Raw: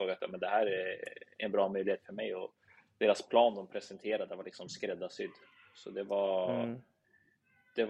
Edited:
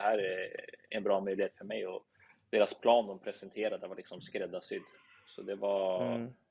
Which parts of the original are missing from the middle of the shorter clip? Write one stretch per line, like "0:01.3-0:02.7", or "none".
none